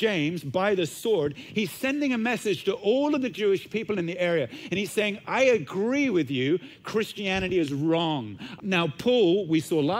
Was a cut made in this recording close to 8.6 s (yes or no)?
yes